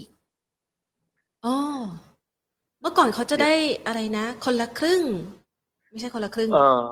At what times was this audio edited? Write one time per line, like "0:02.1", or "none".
none